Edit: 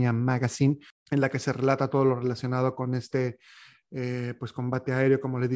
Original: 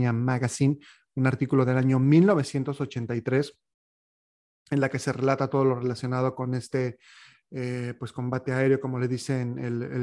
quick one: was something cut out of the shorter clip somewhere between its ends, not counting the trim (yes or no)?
yes